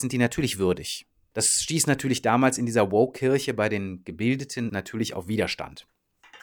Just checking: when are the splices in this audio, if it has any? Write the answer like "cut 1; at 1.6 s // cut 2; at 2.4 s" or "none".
cut 1; at 1.3 s // cut 2; at 4.7 s